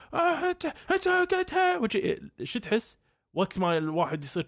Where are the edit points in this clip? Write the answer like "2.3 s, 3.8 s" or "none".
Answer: none